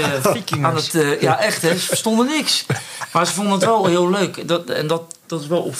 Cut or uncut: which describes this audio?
uncut